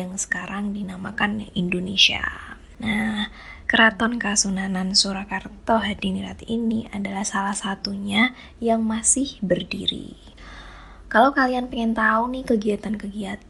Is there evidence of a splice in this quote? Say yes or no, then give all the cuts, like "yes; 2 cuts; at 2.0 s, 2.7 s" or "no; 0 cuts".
no; 0 cuts